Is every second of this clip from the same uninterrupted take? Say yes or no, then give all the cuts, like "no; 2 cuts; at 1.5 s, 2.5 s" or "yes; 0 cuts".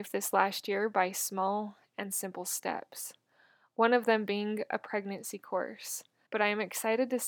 no; 1 cut; at 6.3 s